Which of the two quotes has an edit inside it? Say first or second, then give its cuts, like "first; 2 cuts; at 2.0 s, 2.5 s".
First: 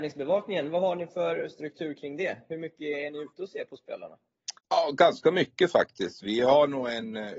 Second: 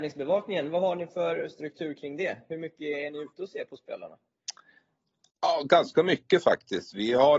first; 1 cut; at 4.6 s